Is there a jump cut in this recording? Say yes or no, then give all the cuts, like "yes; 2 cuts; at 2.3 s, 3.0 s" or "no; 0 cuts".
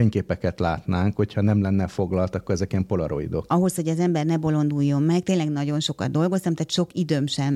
yes; 1 cut; at 3.5 s